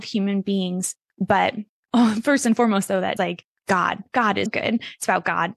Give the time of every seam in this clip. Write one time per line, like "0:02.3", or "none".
0:03.2
0:04.5